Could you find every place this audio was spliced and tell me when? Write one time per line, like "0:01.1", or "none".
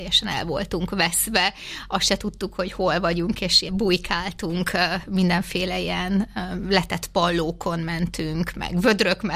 0:03.7